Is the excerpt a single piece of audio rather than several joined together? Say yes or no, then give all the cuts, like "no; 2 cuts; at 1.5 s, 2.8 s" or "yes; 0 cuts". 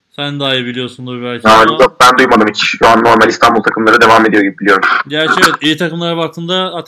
yes; 0 cuts